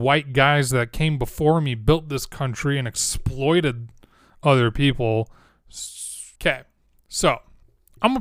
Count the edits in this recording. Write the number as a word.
one